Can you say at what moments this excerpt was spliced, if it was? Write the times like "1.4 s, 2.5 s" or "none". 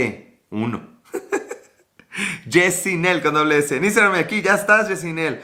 none